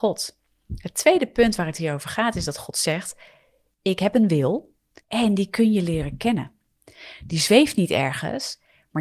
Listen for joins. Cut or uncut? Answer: cut